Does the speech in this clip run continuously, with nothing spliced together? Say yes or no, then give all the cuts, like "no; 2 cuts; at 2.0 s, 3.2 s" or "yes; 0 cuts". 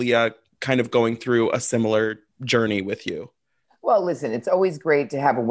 yes; 0 cuts